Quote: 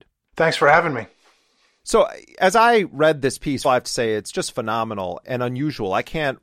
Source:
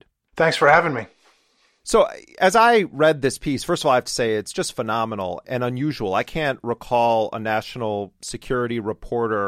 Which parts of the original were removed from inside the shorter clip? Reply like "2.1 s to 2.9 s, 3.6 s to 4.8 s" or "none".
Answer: 3.6 s to 3.9 s